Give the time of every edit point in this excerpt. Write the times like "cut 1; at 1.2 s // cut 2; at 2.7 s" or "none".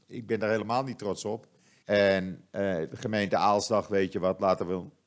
cut 1; at 1.8 s